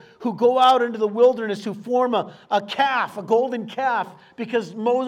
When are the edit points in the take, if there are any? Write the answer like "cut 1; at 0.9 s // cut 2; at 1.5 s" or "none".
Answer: none